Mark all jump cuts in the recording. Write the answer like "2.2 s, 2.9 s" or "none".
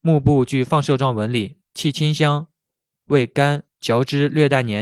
1.6 s, 3.7 s